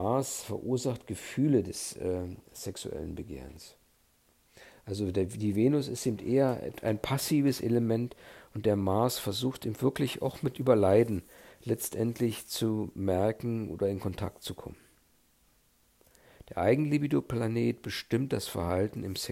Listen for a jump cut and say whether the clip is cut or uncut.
uncut